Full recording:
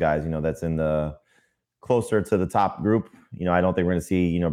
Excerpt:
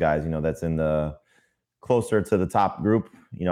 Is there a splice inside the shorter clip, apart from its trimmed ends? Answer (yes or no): no